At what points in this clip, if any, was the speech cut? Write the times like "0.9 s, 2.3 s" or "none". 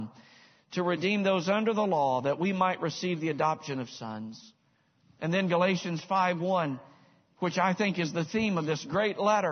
none